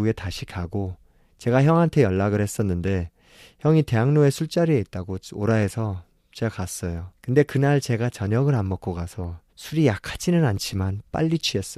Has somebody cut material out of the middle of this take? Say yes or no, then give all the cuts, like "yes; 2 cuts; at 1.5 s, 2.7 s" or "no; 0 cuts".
yes; 2 cuts; at 7.2 s, 9.5 s